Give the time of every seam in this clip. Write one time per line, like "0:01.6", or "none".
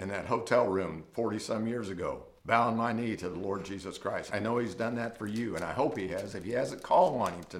0:02.4
0:04.3